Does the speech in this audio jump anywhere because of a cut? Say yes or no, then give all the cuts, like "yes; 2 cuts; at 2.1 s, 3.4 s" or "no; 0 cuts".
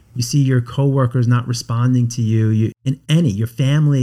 yes; 1 cut; at 2.7 s